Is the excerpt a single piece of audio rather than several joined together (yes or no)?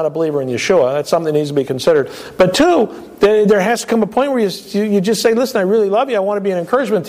yes